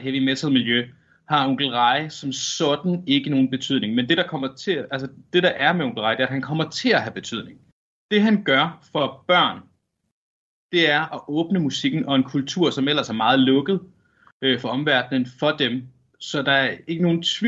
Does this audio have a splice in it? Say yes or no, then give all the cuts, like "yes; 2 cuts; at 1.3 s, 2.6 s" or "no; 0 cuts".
no; 0 cuts